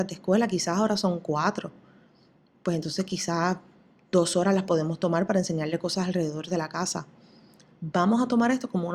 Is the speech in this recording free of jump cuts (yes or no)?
yes